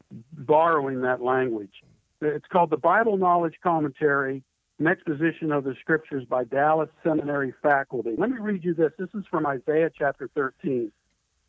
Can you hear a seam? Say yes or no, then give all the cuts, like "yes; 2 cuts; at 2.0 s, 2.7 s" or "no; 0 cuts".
yes; 2 cuts; at 2.2 s, 8.2 s